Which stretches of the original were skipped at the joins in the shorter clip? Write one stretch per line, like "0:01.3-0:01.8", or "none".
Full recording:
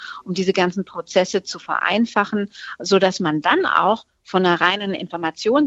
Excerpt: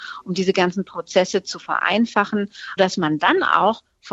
0:02.8-0:03.0